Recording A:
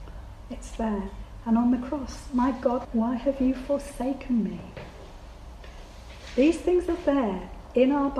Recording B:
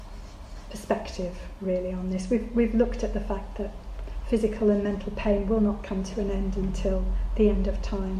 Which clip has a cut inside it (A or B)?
A